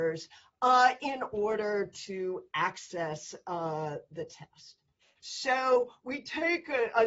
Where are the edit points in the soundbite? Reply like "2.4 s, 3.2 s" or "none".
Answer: 5.2 s